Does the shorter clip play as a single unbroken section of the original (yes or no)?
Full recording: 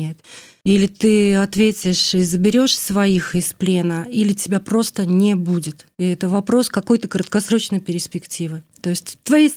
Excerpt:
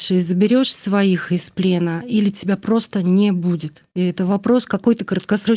yes